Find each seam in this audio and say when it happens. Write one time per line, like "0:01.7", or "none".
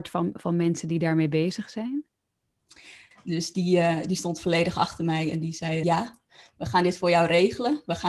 0:03.1
0:05.8